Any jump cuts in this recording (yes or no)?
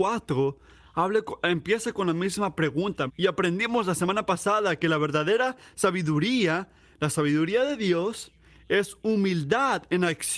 yes